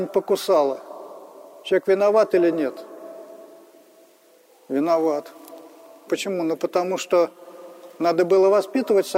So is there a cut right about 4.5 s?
no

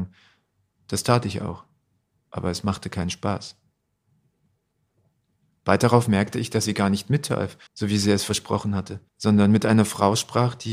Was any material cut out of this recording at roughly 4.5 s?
no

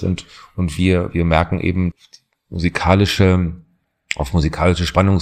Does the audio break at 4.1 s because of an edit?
no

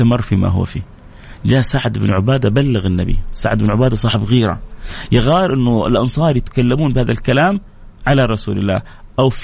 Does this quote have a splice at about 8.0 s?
yes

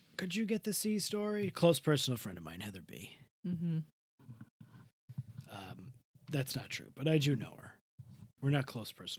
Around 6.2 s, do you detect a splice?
no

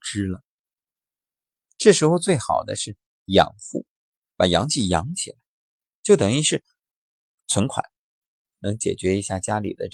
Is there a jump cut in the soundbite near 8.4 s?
yes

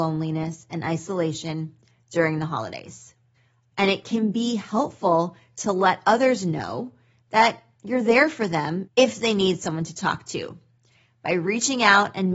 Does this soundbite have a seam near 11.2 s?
no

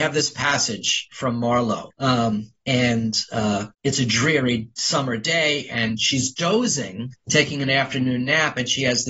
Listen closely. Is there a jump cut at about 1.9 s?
yes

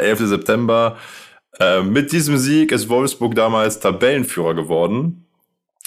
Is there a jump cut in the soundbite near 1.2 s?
no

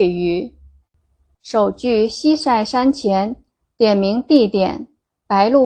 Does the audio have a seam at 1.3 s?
yes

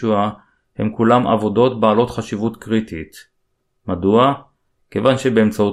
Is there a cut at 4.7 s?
no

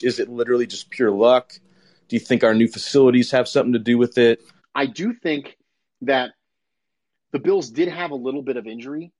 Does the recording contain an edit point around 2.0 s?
no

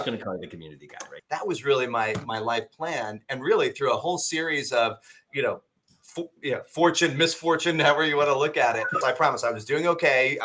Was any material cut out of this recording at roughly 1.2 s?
yes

